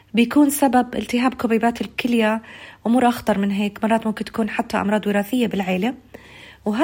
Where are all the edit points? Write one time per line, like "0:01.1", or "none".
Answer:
none